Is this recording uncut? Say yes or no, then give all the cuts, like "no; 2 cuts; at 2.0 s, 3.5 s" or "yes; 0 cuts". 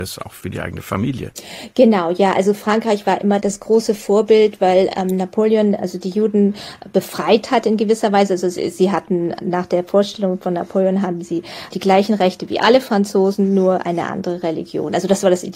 yes; 0 cuts